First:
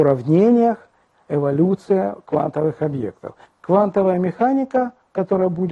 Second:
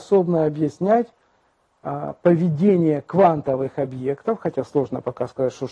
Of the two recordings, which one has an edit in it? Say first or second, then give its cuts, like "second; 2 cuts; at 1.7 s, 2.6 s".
first; 2 cuts; at 1.1 s, 3.4 s